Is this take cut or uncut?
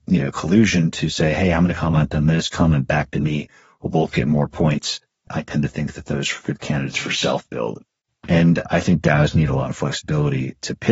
cut